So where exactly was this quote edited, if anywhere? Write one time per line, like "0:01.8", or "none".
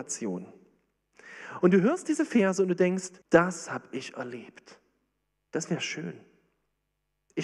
0:01.6
0:03.2
0:05.5